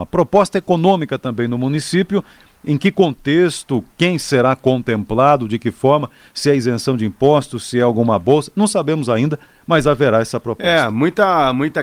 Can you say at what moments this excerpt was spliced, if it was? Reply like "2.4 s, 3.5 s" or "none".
none

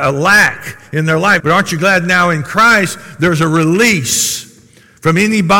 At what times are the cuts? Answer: 1.4 s

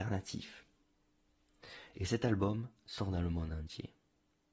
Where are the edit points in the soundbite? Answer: 1.9 s

